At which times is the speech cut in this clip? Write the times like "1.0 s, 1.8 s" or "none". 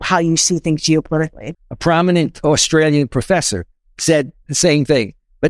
1.5 s